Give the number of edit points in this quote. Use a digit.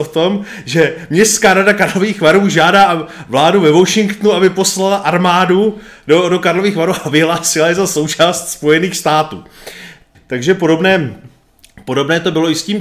1